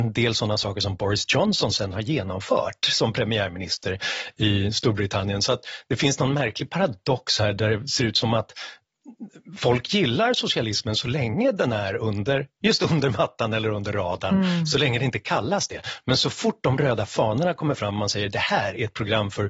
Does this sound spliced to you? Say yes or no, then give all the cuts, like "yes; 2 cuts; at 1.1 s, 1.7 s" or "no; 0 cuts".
no; 0 cuts